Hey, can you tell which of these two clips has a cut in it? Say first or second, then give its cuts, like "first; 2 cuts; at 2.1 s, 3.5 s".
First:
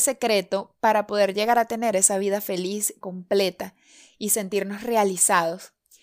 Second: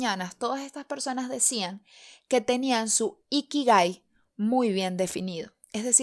first; 1 cut; at 3.0 s